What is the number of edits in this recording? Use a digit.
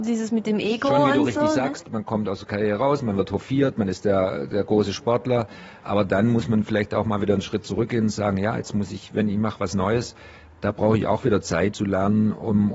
1